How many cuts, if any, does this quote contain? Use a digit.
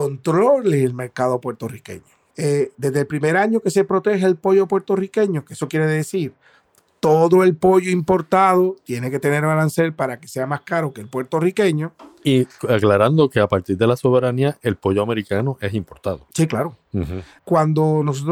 2